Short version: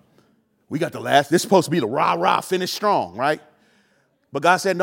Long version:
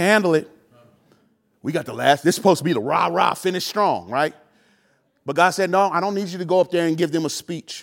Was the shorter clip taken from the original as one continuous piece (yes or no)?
yes